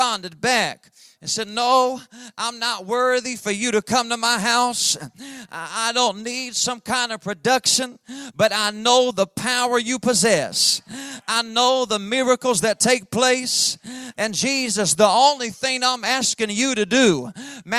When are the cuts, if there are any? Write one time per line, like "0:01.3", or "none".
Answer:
0:14.1